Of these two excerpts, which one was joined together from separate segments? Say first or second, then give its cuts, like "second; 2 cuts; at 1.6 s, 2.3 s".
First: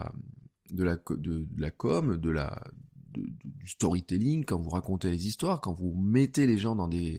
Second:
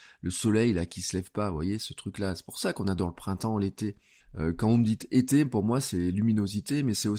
second; 1 cut; at 4.2 s